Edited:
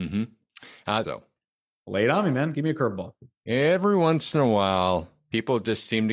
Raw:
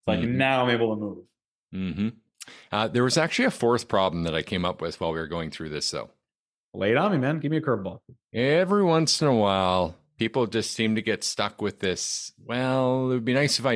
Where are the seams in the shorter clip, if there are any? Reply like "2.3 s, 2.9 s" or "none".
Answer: 1.0 s